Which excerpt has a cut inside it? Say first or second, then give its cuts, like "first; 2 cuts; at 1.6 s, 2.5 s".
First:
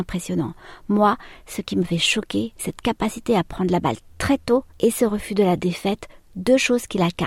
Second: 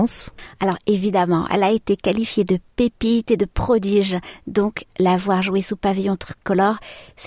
first; 2 cuts; at 2.6 s, 4.7 s